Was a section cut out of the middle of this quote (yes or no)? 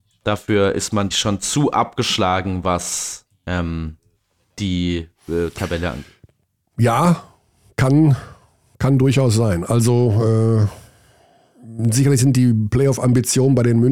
yes